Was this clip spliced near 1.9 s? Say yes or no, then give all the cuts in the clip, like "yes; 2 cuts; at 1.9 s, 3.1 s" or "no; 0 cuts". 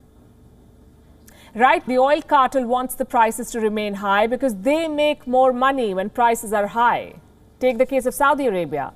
yes; 1 cut; at 1.9 s